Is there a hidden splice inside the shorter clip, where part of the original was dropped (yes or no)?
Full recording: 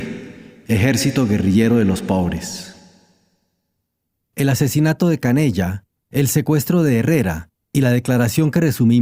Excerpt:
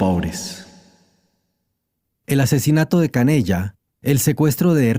no